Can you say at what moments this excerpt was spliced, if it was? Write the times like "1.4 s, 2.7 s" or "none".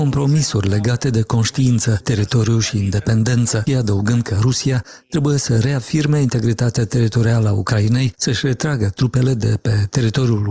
2.0 s, 3.7 s